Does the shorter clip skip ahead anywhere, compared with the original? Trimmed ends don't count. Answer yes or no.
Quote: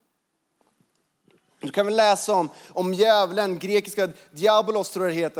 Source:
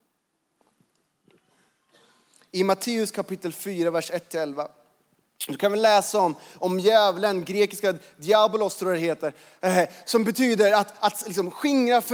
yes